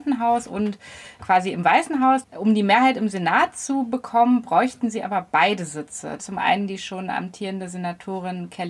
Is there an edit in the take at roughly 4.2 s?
no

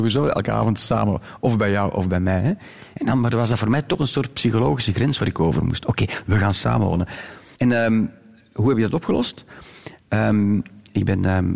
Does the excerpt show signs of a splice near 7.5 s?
yes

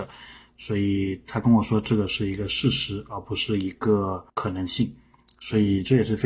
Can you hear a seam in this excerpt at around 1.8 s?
no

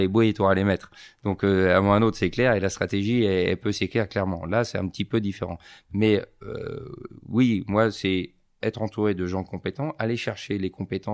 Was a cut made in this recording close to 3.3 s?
no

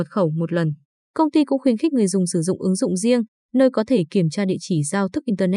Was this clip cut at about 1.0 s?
yes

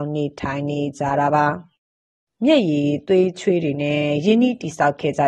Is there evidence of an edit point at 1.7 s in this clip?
no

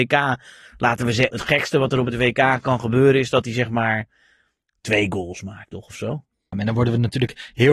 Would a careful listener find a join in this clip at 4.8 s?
no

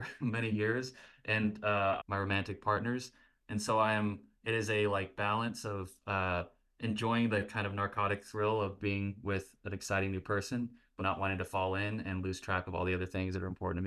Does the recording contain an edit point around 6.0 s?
no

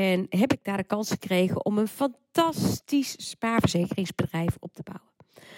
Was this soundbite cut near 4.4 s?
no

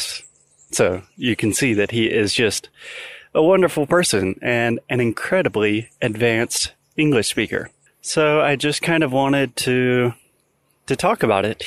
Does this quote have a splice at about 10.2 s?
no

